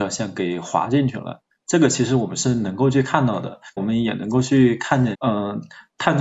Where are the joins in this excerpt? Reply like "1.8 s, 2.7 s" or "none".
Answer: 3.8 s, 5.1 s